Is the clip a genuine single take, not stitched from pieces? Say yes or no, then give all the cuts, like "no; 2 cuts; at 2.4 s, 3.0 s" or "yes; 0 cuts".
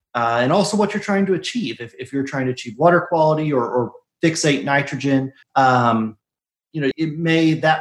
no; 2 cuts; at 5.4 s, 6.9 s